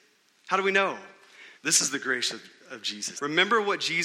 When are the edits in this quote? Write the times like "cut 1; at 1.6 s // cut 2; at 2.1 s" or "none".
cut 1; at 1.6 s // cut 2; at 3.2 s